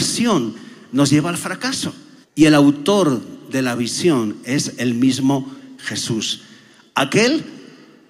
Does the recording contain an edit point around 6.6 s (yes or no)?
no